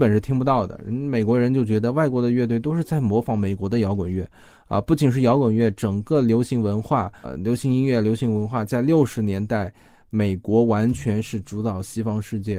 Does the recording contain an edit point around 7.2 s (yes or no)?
yes